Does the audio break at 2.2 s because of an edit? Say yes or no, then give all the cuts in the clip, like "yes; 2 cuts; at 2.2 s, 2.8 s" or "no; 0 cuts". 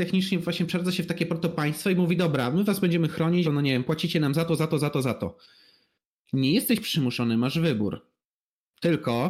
no; 1 cut; at 3.4 s